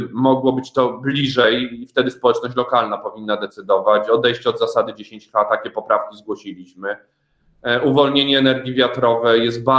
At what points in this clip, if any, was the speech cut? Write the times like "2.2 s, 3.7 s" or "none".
none